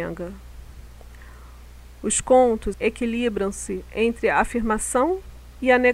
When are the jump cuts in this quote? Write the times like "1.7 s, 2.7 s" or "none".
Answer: 2.7 s